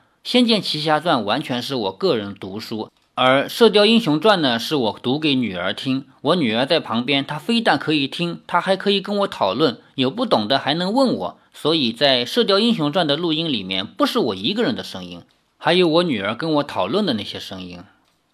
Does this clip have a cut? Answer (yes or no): no